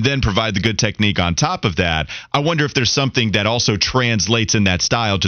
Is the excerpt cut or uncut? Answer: uncut